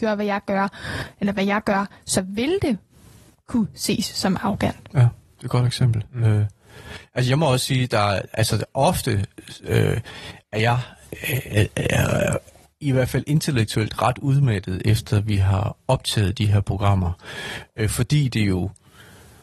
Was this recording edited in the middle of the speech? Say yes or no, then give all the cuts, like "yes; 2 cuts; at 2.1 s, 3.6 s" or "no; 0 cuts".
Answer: no; 0 cuts